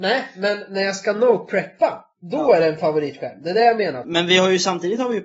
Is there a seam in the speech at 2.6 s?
no; 1 cut; at 4.0 s

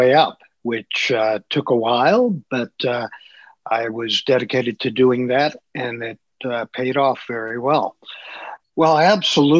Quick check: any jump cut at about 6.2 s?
no; 1 cut; at 8.6 s

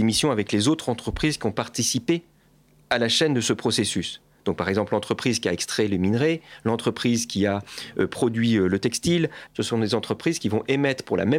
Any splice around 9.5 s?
yes; 1 cut; at 9.5 s

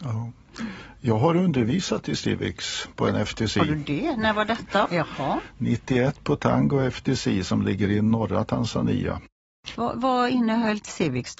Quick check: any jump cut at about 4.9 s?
yes; 1 cut; at 4.9 s

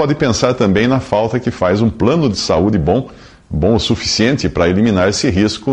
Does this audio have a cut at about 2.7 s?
no; 0 cuts

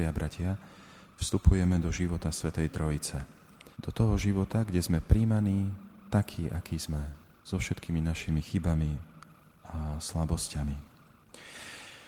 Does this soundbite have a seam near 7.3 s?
no; 1 cut; at 3.7 s

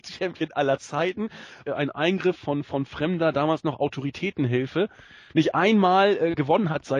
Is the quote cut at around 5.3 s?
no; 1 cut; at 1.7 s

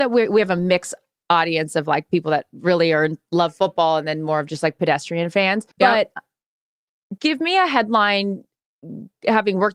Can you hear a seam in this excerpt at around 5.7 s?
yes; 2 cuts; at 5.7 s, 7.2 s

